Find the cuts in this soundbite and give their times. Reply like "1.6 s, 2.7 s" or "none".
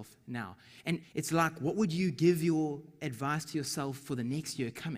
1.0 s